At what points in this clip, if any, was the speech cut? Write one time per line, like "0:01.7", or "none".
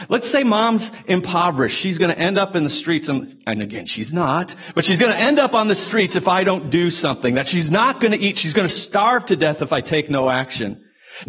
none